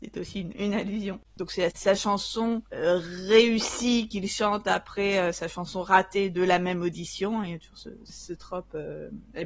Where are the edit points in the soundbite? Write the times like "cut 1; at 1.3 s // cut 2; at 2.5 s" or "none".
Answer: cut 1; at 1.2 s